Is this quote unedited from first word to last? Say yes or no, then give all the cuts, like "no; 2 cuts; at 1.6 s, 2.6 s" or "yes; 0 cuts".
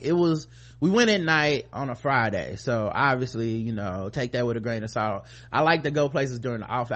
yes; 0 cuts